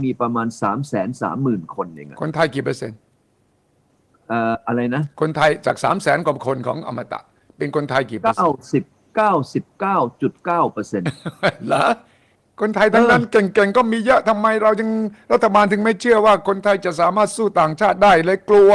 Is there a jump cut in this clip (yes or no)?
no